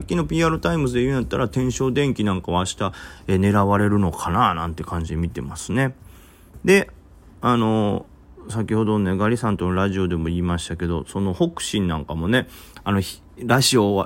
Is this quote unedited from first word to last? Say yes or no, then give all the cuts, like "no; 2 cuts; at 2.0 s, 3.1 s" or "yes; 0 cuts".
yes; 0 cuts